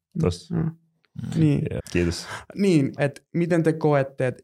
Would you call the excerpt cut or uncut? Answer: cut